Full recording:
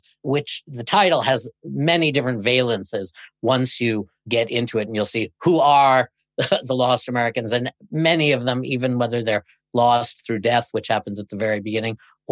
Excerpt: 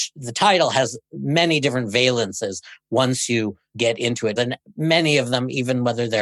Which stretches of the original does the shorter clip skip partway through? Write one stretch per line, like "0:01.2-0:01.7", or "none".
0:04.9-0:07.5